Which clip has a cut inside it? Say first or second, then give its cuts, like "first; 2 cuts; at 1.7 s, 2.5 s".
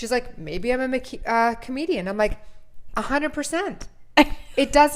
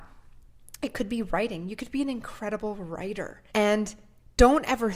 second; 1 cut; at 3.5 s